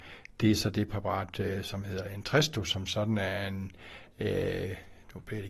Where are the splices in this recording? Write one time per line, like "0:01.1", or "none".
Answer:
none